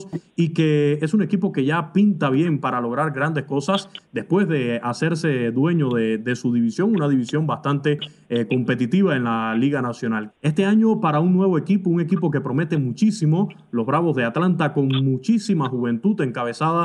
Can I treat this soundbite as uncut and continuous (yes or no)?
no